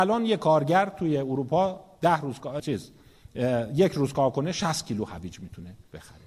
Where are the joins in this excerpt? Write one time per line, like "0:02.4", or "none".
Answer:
0:02.6